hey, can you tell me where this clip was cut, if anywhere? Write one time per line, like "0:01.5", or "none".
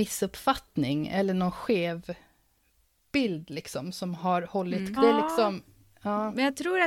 0:05.0